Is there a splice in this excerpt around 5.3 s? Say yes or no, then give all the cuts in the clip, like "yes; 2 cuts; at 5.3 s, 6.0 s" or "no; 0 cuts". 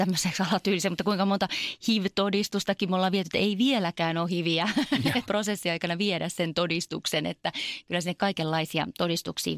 yes; 1 cut; at 5.3 s